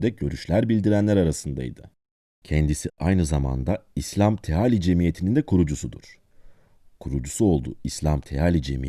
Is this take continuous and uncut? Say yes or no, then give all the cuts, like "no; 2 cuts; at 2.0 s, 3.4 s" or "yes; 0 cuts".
yes; 0 cuts